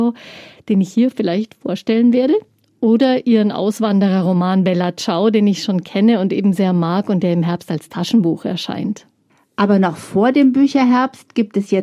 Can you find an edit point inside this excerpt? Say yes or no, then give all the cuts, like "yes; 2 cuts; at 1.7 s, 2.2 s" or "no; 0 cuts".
no; 0 cuts